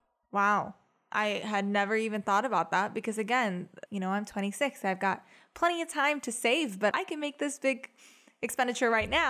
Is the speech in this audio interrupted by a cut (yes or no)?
yes